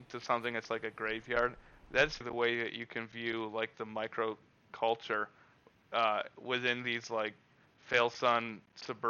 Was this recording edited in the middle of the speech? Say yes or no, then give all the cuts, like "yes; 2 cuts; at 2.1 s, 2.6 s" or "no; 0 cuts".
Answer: yes; 1 cut; at 2.2 s